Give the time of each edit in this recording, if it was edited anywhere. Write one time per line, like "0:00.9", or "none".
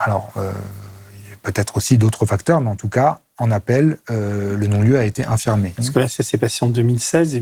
0:05.8

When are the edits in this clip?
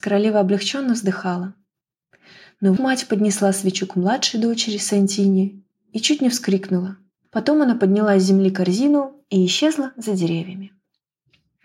0:02.8
0:07.2

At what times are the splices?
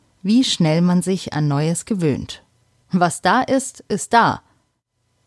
0:02.8

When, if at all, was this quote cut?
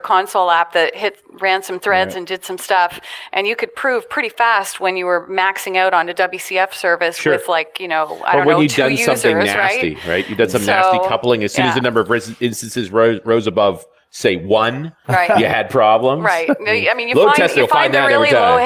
none

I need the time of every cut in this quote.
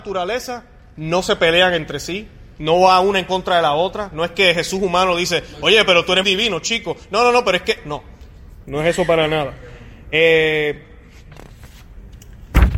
0:06.2
0:08.6

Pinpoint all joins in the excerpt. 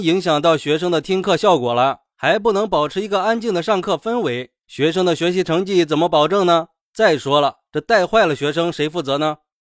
none

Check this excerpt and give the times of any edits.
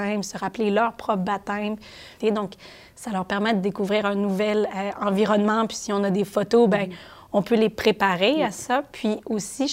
0:02.2

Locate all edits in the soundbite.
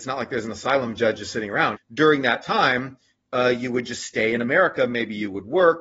0:01.8

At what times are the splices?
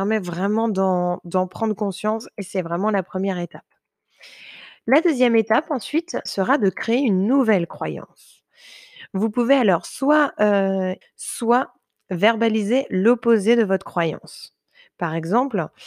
0:06.3
0:11.0

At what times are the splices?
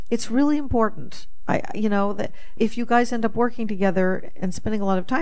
0:02.6

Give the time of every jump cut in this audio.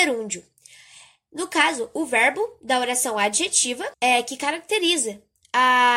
0:03.9

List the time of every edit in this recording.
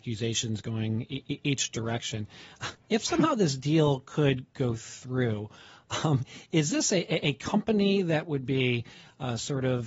none

